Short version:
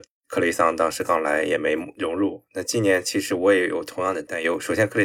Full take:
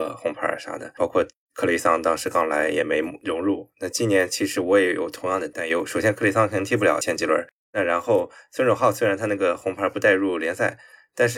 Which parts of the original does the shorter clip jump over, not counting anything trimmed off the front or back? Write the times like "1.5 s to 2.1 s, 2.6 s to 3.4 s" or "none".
none